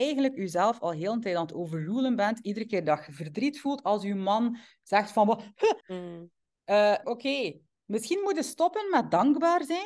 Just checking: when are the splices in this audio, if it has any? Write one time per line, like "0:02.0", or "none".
0:05.8
0:07.0